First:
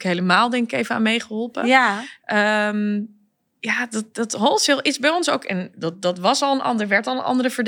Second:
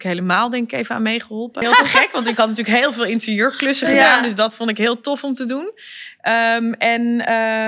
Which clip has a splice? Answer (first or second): second